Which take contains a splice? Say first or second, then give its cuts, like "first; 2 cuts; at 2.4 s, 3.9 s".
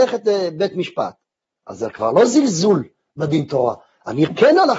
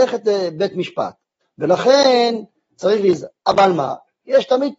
second; 1 cut; at 1.4 s